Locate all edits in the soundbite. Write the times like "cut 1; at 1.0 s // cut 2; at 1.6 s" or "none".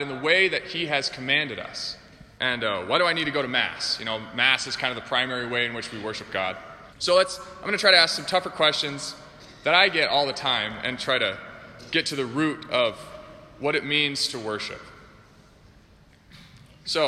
cut 1; at 2.4 s // cut 2; at 6.9 s